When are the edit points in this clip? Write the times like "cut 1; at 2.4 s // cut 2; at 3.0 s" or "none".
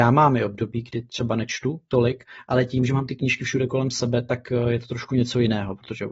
none